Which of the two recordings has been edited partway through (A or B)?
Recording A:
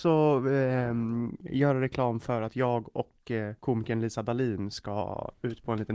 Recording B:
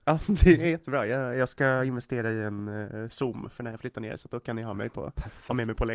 A